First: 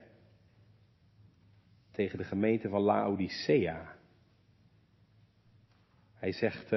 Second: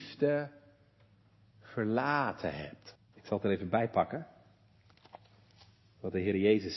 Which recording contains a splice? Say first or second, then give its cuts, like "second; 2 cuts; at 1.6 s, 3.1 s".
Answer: second; 1 cut; at 3.0 s